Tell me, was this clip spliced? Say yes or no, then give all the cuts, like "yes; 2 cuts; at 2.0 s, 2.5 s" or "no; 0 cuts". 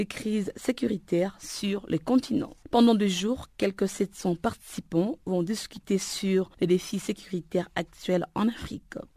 no; 0 cuts